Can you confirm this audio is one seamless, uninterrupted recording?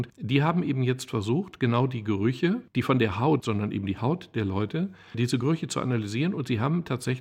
no; 1 cut; at 3.4 s

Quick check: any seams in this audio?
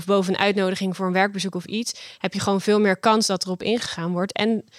no; 0 cuts

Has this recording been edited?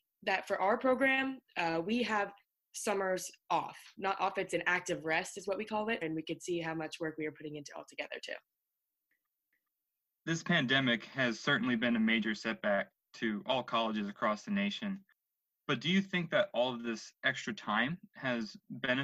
yes; 1 cut; at 6.0 s

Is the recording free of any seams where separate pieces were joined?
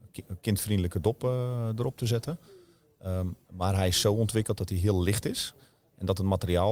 yes; 0 cuts

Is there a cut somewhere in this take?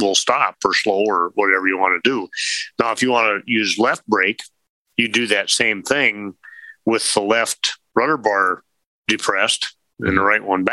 no; 0 cuts

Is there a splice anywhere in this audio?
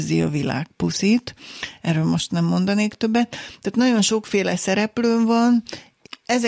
no; 0 cuts

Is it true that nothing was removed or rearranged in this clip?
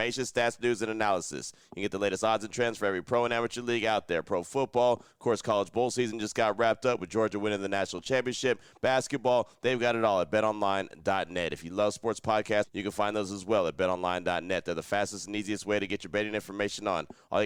no; 1 cut; at 12.6 s

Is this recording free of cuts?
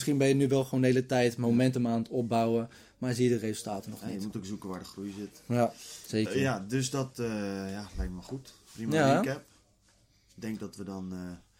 yes; 0 cuts

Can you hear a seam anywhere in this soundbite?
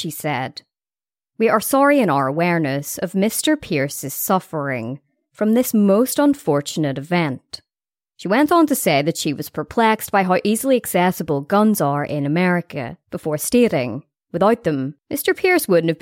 no; 0 cuts

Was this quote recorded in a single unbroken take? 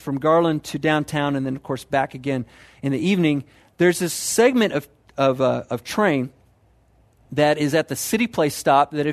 yes; 0 cuts

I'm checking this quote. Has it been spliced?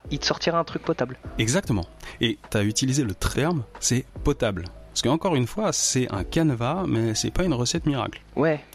yes; 1 cut; at 3.3 s

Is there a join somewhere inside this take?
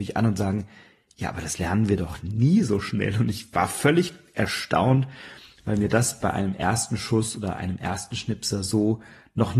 no; 0 cuts

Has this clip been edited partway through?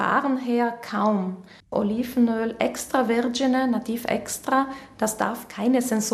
yes; 1 cut; at 1.6 s

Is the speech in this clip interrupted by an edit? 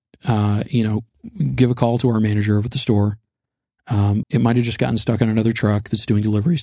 yes; 1 cut; at 4.2 s

